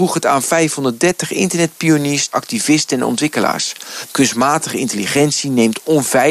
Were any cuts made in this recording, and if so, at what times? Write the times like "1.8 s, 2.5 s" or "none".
2.3 s, 4.1 s